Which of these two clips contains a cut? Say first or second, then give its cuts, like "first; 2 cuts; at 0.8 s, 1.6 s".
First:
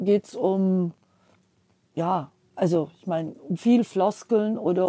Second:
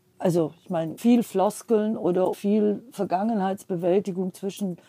second; 2 cuts; at 1.0 s, 2.3 s